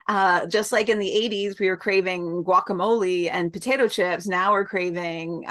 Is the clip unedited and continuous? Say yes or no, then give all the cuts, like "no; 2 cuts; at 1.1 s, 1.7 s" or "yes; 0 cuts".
yes; 0 cuts